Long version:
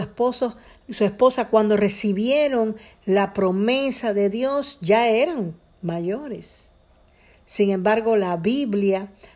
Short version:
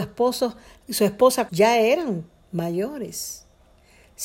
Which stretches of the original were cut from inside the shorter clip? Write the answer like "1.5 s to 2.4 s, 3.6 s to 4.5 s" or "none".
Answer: 1.5 s to 4.8 s